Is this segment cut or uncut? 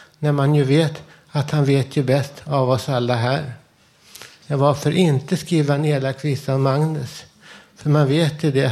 cut